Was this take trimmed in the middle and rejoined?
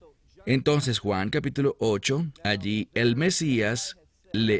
yes; 1 cut; at 2.4 s

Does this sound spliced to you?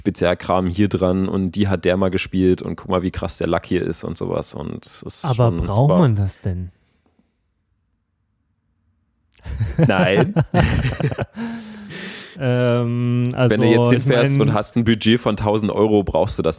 no; 0 cuts

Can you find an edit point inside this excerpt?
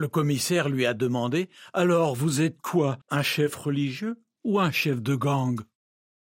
yes; 1 cut; at 3.0 s

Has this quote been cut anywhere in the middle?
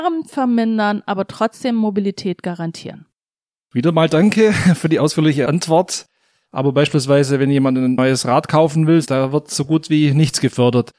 yes; 2 cuts; at 6.4 s, 9.0 s

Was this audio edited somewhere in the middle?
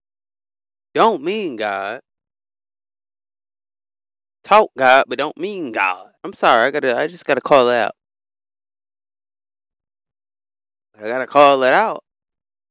yes; 2 cuts; at 6.2 s, 10.8 s

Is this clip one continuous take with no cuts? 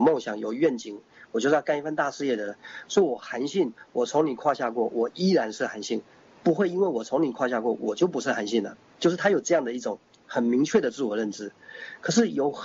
yes; 0 cuts

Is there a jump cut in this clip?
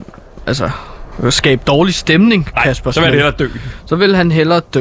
no; 0 cuts

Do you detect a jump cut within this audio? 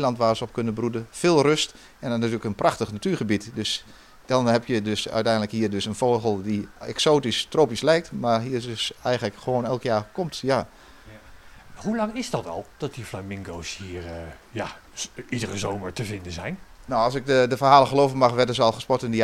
no; 0 cuts

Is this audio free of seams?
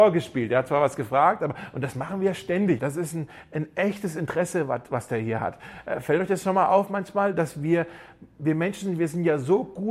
no; 1 cut; at 2.8 s

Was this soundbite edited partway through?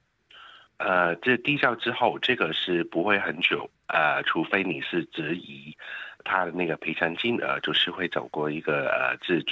no; 0 cuts

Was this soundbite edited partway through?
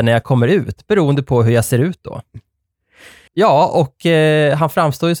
yes; 1 cut; at 3.3 s

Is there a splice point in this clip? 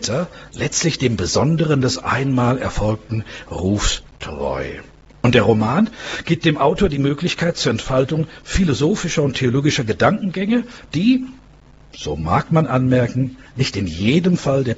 no; 0 cuts

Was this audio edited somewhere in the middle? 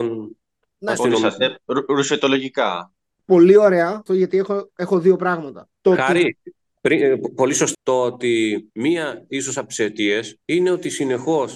yes; 3 cuts; at 4.1 s, 5.7 s, 7.7 s

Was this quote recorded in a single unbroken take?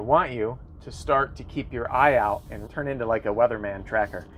no; 1 cut; at 2.7 s

